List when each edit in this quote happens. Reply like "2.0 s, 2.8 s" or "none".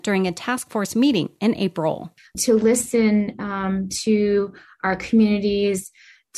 none